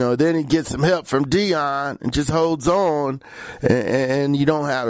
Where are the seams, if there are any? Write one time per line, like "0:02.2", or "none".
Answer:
none